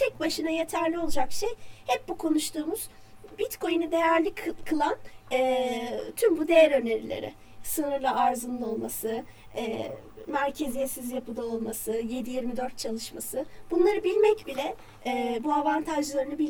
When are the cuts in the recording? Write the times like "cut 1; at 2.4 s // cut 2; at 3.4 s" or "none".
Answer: none